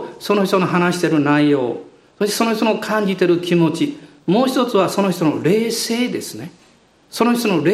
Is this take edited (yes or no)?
no